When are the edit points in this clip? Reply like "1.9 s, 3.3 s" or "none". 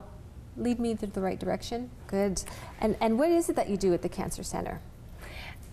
2.0 s